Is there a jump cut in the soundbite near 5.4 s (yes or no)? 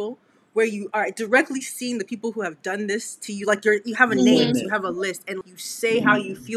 yes